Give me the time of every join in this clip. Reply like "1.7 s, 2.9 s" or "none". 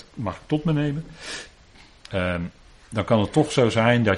2.1 s